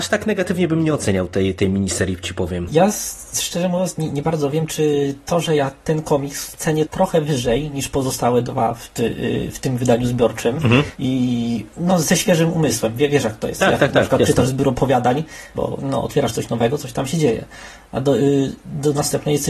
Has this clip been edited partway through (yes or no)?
yes